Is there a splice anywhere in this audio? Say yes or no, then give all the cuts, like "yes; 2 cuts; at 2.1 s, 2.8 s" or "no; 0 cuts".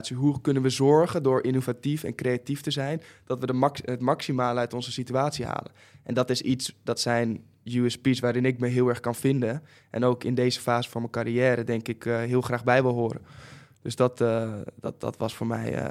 no; 0 cuts